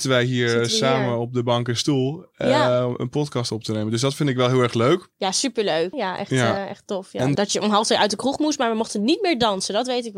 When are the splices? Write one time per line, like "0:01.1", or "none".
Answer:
0:05.9
0:07.4